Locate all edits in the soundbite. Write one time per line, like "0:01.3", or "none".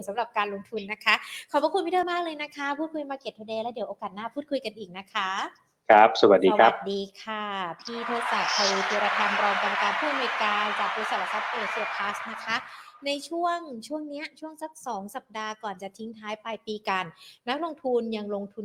0:02.0